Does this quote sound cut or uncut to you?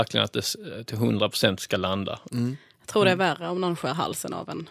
cut